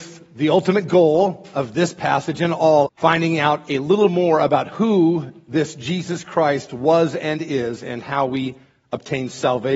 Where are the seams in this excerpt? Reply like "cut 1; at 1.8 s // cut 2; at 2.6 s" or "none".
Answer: cut 1; at 2.9 s